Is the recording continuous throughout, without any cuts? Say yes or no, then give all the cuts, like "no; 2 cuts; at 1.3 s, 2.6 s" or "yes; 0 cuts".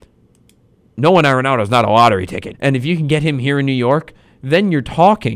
no; 1 cut; at 2.5 s